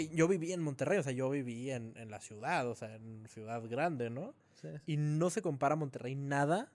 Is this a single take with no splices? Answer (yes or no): yes